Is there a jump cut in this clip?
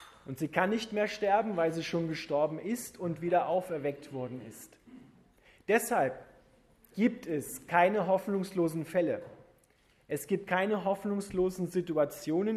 no; 0 cuts

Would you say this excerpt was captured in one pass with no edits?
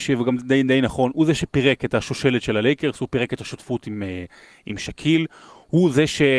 yes; 0 cuts

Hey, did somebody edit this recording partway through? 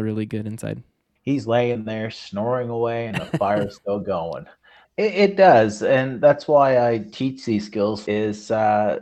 yes; 3 cuts; at 1.2 s, 4.8 s, 8.1 s

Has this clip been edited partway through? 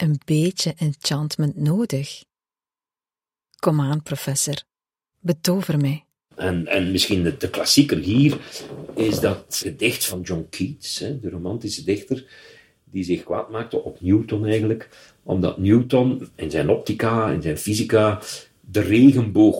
yes; 2 cuts; at 6.3 s, 9.6 s

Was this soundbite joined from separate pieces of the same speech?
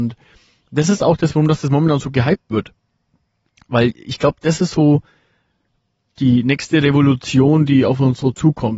no; 0 cuts

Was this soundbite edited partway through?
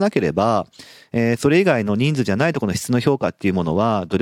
no; 0 cuts

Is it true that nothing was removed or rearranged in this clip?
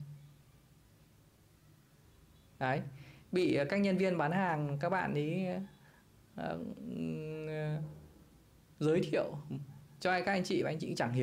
yes; 0 cuts

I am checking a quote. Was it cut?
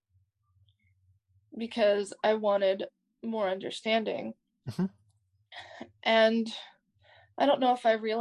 no; 0 cuts

